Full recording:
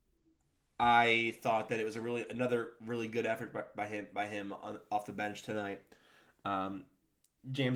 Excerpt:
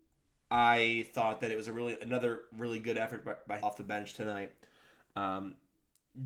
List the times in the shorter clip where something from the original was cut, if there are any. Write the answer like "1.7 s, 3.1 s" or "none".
3.6 s